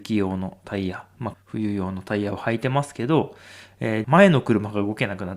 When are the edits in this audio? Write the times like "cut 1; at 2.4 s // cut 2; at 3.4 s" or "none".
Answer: cut 1; at 1.3 s // cut 2; at 4.0 s